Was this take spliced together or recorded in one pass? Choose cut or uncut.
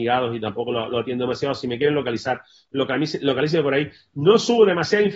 uncut